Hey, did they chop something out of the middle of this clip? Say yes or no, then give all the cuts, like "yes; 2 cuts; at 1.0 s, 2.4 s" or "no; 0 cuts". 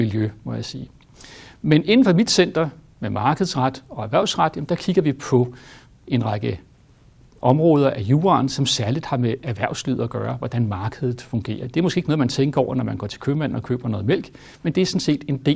yes; 1 cut; at 11.6 s